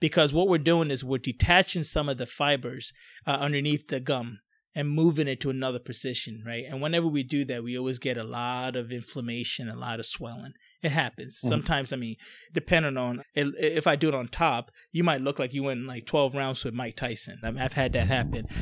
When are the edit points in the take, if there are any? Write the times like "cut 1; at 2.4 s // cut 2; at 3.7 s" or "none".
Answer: cut 1; at 13.2 s // cut 2; at 17.4 s